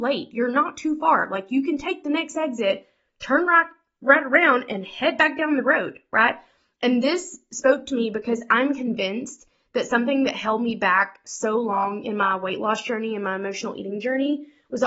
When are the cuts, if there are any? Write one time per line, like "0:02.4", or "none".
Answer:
none